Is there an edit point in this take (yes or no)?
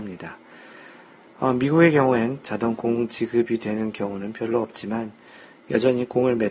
yes